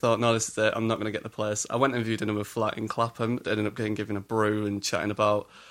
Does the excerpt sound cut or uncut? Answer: cut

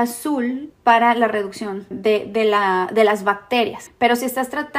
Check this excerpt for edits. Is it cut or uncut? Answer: cut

